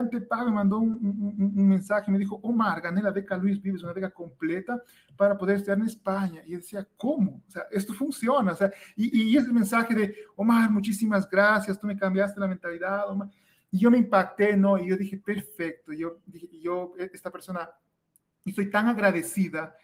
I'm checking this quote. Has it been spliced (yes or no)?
no